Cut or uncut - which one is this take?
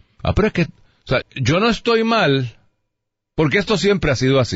cut